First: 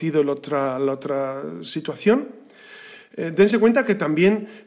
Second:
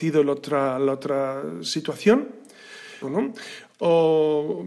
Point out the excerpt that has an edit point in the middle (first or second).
second